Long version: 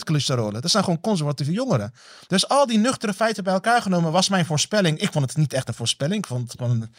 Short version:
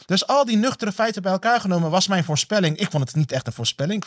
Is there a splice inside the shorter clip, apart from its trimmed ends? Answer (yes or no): no